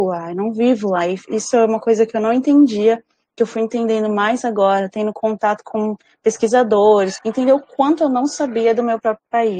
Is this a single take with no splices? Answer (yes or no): no